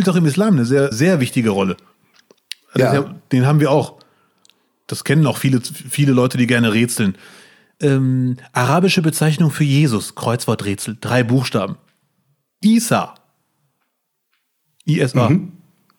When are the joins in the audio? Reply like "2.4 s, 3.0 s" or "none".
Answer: 0.9 s